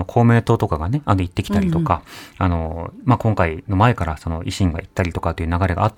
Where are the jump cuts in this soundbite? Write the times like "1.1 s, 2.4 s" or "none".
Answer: none